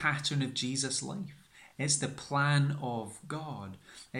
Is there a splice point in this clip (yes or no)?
no